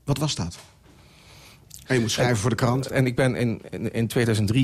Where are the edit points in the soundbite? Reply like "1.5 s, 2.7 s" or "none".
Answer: 1.8 s, 2.9 s